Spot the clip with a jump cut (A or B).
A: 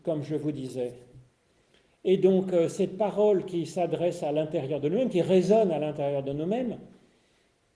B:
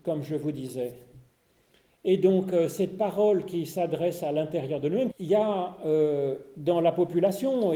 B